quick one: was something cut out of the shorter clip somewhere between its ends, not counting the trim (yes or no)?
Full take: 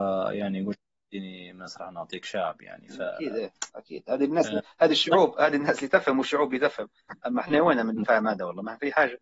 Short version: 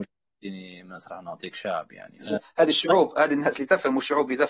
yes